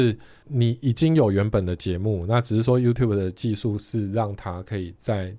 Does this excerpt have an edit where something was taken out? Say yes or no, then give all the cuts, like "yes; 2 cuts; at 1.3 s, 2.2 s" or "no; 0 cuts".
no; 0 cuts